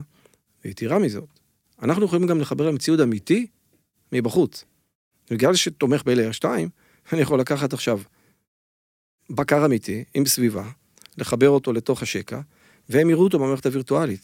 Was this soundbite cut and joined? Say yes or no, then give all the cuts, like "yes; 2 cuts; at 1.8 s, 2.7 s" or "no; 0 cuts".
no; 0 cuts